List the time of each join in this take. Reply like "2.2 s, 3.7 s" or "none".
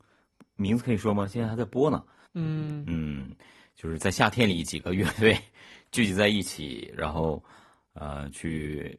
2.3 s